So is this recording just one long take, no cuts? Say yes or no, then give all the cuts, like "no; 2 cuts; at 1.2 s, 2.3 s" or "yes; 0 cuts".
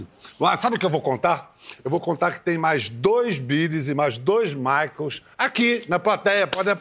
yes; 0 cuts